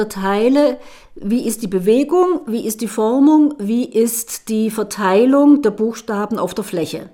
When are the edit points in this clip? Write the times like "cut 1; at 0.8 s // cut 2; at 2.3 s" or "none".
none